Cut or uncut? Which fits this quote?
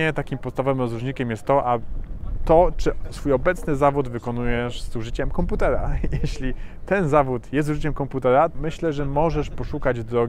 cut